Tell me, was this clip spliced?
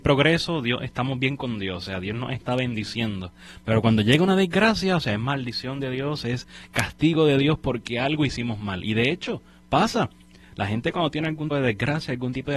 yes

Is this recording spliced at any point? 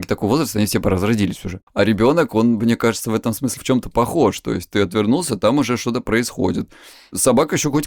yes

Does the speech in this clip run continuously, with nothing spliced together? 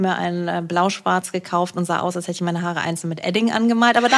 yes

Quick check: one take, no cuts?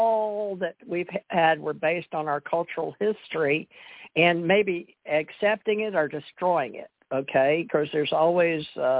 yes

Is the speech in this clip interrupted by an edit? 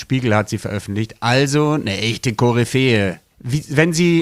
yes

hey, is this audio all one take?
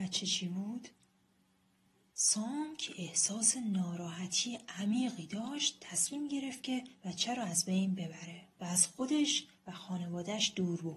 no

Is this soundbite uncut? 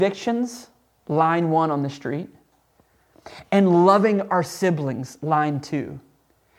yes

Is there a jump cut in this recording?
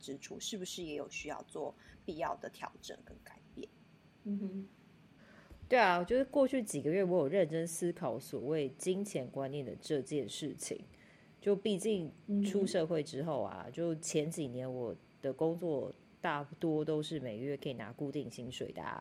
no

